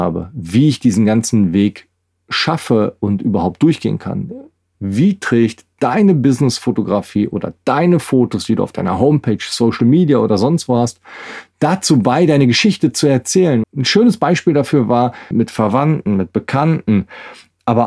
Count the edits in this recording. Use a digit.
3